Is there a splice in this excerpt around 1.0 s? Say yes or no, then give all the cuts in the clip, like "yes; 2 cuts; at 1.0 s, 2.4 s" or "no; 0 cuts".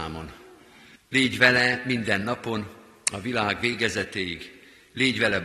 yes; 1 cut; at 1.0 s